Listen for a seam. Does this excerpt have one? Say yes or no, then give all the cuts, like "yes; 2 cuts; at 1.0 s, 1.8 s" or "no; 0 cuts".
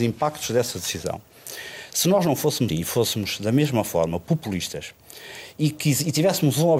yes; 1 cut; at 2.7 s